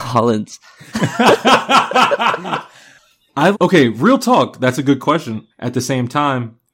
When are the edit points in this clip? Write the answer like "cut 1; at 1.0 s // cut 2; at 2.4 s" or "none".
cut 1; at 3.5 s // cut 2; at 5.5 s